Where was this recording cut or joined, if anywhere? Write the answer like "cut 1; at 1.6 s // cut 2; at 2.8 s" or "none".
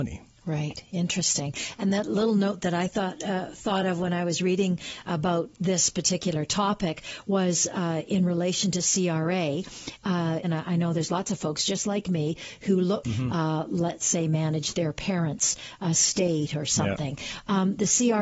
cut 1; at 10.4 s // cut 2; at 13.0 s